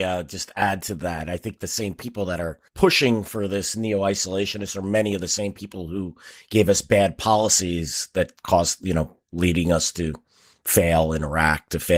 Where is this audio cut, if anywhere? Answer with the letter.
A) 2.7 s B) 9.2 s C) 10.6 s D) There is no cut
A